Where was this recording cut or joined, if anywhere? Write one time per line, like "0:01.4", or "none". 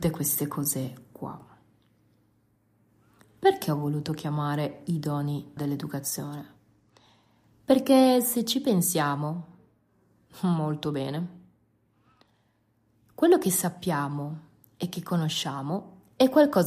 0:05.6

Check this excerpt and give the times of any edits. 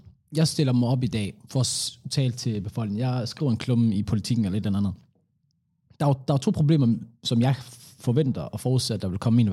none

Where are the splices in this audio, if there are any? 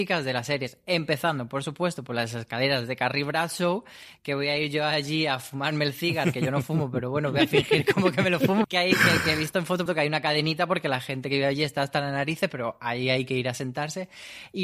0:08.6
0:09.9

